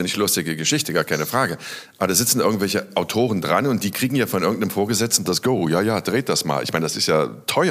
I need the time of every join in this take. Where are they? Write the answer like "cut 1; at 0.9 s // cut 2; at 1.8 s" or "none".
none